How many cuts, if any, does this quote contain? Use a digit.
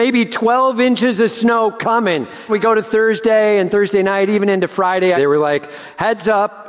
2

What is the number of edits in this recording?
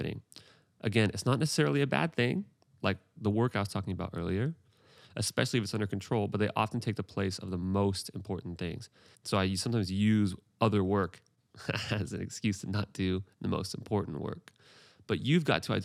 2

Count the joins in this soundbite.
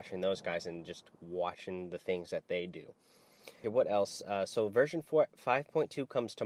1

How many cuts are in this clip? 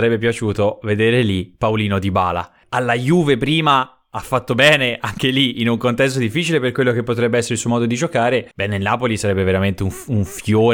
2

